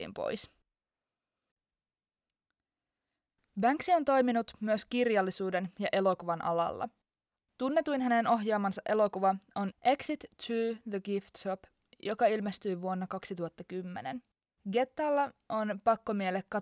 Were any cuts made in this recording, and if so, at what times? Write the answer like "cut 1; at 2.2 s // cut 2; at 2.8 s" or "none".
cut 1; at 14.6 s